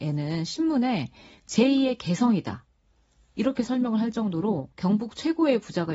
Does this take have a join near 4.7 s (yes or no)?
yes